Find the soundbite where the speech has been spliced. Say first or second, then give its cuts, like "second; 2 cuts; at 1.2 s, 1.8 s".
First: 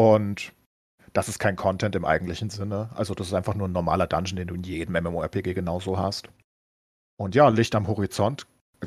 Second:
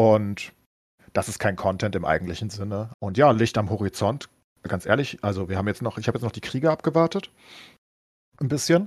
second; 1 cut; at 2.9 s